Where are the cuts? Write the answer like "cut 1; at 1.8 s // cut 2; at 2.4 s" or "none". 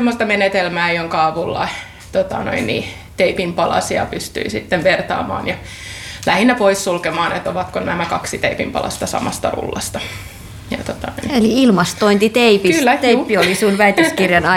none

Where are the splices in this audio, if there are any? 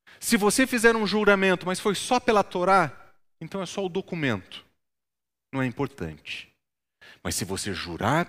none

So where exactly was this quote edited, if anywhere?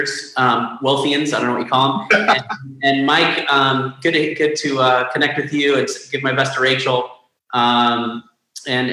none

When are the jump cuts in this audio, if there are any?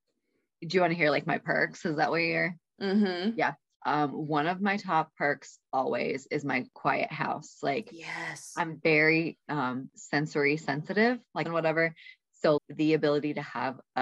cut 1; at 11.5 s // cut 2; at 12.6 s

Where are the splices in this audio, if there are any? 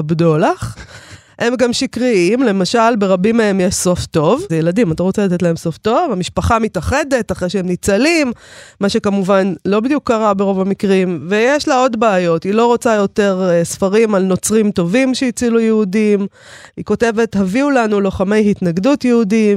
cut 1; at 4.5 s

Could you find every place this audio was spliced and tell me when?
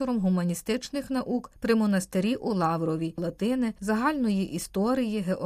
cut 1; at 3.2 s

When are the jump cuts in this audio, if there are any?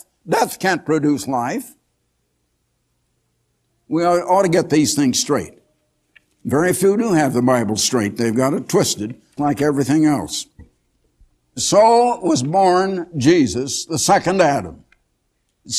cut 1; at 9.4 s

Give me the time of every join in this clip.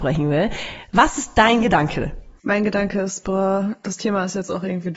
cut 1; at 2.4 s

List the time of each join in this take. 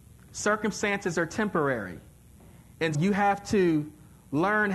cut 1; at 2.9 s

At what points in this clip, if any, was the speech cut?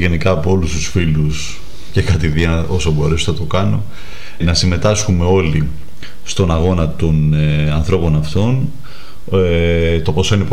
cut 1; at 4.4 s

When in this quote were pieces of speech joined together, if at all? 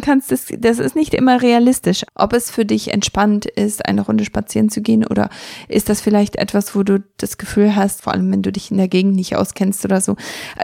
cut 1; at 2.1 s // cut 2; at 8.0 s

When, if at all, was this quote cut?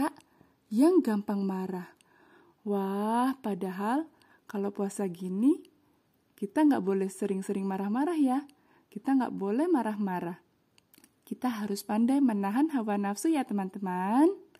none

